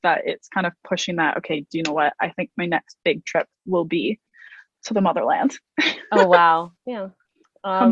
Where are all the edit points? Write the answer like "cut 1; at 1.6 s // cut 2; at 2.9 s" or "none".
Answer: cut 1; at 6.8 s